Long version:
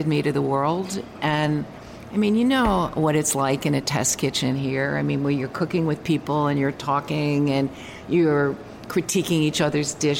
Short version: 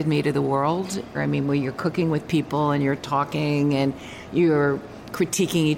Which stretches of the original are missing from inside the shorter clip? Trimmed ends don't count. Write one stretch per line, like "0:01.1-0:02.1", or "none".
0:01.1-0:04.9